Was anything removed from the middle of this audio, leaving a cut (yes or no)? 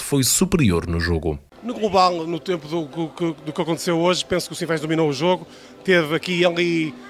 no